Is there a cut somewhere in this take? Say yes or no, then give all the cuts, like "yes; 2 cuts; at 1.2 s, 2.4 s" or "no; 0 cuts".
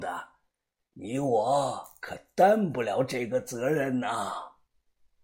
no; 0 cuts